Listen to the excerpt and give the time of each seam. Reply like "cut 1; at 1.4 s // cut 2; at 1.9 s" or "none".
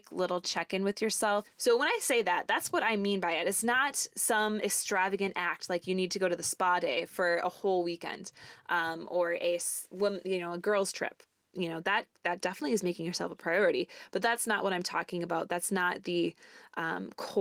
cut 1; at 1.4 s